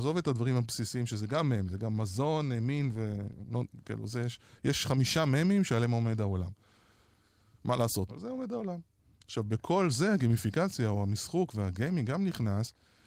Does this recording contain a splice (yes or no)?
yes